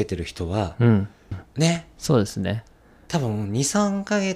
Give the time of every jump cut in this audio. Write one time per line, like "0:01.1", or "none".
0:01.3